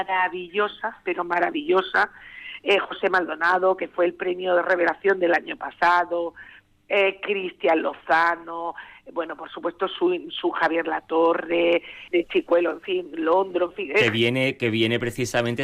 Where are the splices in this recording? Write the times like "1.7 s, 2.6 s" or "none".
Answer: 12.1 s